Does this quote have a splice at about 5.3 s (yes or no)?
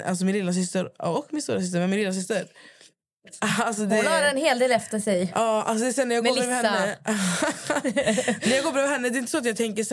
no